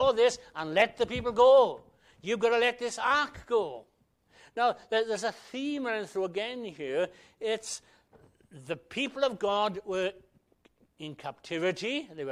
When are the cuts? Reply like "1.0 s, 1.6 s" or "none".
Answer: none

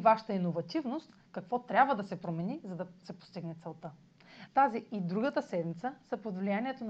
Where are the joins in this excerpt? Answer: 4.5 s

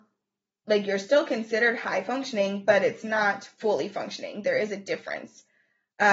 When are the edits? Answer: none

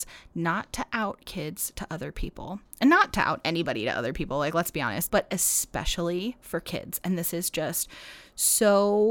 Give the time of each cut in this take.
5.1 s

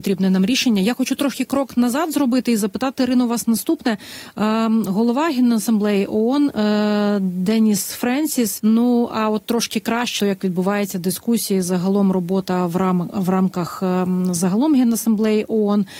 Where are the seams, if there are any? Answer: 8.6 s, 10.2 s

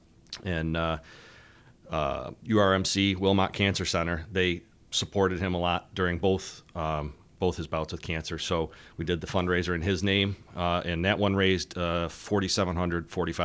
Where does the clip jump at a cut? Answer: 2.4 s

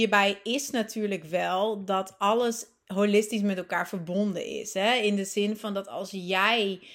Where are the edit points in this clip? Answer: none

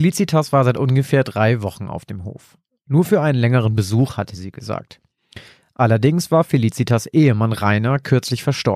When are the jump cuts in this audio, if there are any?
none

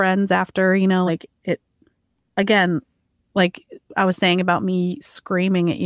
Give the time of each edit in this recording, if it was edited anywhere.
none

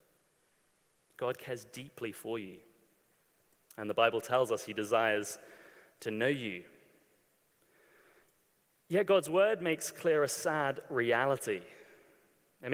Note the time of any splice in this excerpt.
none

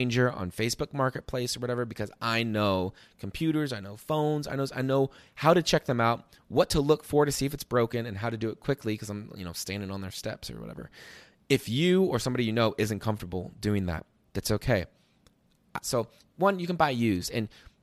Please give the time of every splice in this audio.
15.8 s

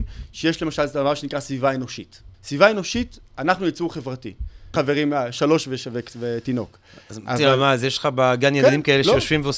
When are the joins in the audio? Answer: 2.3 s, 4.7 s

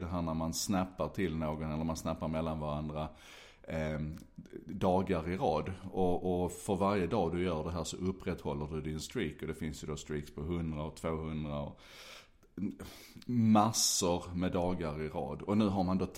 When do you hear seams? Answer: none

